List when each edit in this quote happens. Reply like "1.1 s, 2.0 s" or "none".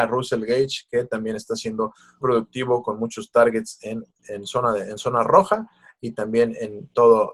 2.2 s, 4.2 s